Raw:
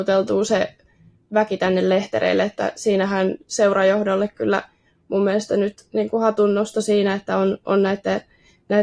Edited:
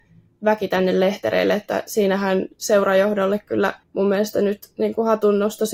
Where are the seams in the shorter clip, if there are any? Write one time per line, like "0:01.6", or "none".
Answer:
0:03.8